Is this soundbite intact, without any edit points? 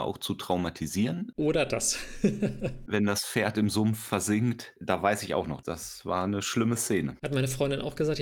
yes; 0 cuts

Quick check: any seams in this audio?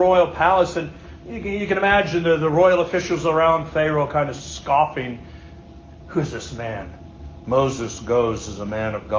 yes; 1 cut; at 7.4 s

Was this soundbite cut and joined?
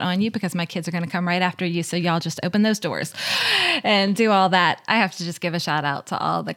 yes; 1 cut; at 4.9 s

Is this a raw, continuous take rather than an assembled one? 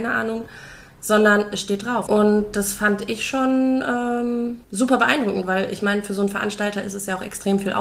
no; 2 cuts; at 2.1 s, 4.6 s

